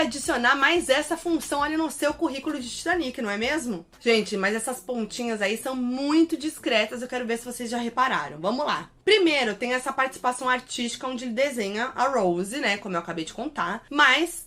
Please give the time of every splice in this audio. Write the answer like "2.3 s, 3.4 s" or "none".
none

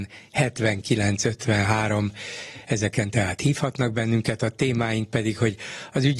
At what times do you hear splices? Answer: none

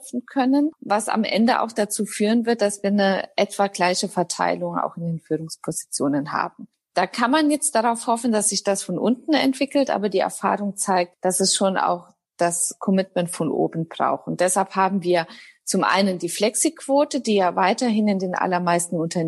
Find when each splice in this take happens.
none

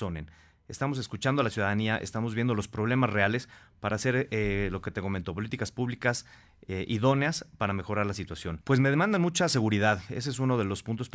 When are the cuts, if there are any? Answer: 8.6 s

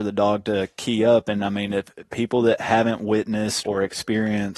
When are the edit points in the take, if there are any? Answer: 3.6 s

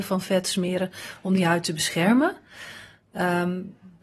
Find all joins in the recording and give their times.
none

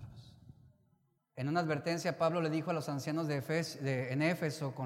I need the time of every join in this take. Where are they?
1.2 s

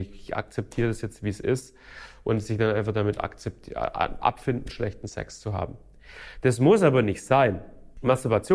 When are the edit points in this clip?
none

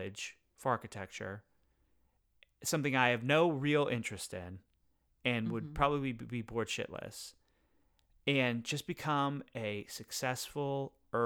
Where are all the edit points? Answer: none

